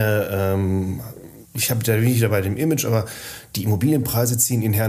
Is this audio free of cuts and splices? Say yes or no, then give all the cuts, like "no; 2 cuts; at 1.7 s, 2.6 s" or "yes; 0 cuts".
yes; 0 cuts